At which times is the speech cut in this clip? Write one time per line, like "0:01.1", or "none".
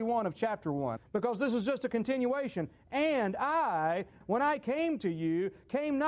0:01.0
0:04.2